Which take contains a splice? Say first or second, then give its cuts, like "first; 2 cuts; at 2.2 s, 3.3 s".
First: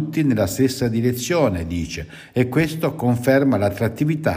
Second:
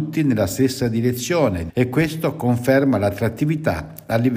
second; 1 cut; at 1.7 s